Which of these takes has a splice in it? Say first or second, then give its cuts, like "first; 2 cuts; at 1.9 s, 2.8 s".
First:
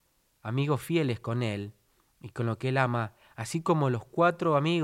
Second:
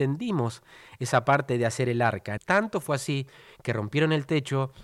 second; 1 cut; at 2.4 s